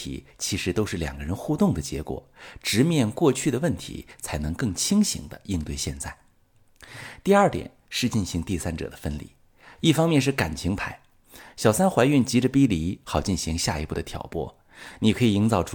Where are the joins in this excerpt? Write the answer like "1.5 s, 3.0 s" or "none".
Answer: 9.8 s, 13.0 s